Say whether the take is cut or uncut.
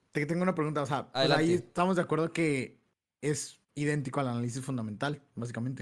cut